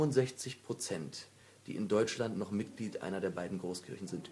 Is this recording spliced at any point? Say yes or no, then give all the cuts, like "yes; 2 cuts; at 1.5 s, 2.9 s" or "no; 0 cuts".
no; 0 cuts